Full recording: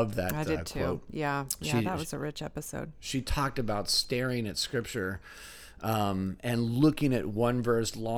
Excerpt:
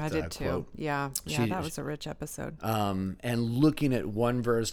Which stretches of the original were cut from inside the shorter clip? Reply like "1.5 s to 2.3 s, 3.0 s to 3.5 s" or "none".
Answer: 2.9 s to 5.8 s